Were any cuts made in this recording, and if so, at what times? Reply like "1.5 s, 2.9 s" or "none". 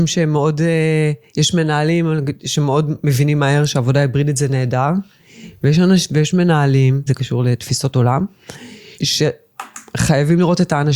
7.1 s, 8.9 s